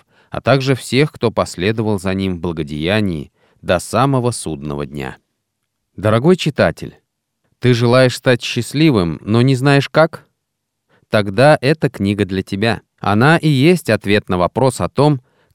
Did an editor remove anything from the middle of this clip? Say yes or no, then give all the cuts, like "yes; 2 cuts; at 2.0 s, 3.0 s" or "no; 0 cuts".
yes; 1 cut; at 12.9 s